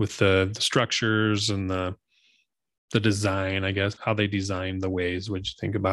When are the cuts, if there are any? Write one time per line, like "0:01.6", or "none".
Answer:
0:04.0